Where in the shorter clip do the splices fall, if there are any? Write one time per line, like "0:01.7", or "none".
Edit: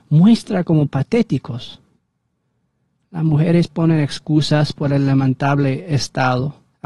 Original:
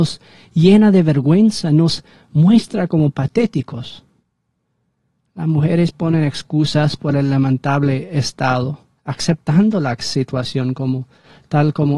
none